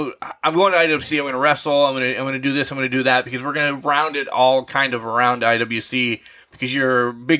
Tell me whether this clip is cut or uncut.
uncut